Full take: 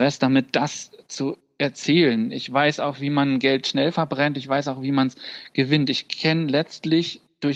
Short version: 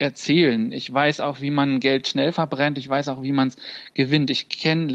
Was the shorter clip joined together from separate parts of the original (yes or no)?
no